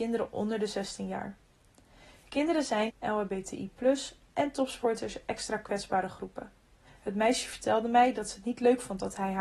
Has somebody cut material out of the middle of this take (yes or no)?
yes